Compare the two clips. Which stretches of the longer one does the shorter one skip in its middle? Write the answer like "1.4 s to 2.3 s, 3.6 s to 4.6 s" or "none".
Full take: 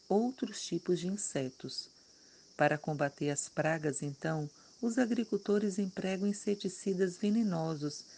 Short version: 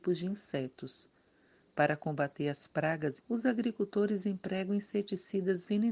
4.0 s to 4.7 s

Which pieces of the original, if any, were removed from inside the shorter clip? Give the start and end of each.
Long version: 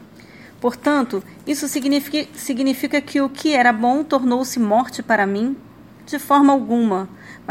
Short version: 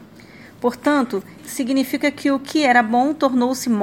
1.4 s to 2.3 s

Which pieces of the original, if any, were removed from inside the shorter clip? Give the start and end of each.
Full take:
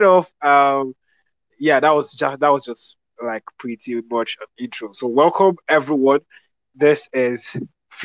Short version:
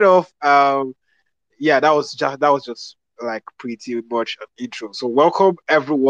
none

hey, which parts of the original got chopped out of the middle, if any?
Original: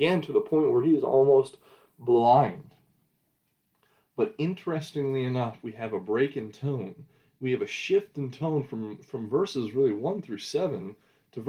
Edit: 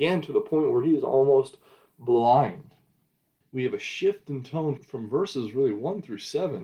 3.4 s to 7.3 s, 8.6 s to 9.0 s

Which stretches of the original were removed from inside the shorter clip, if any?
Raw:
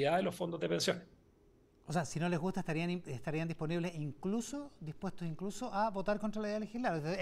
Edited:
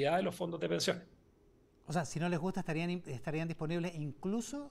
none

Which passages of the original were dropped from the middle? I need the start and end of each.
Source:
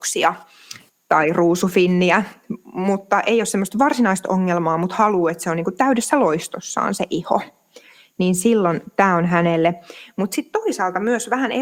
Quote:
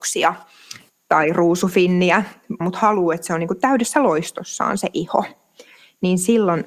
2.6 s to 4.8 s

